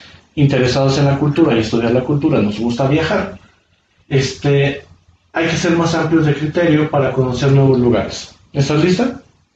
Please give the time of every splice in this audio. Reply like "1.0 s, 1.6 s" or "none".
none